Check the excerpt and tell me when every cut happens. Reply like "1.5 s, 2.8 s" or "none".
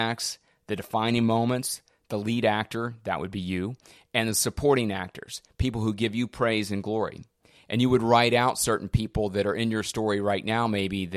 none